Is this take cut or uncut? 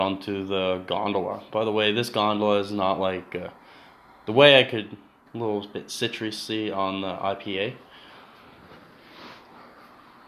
cut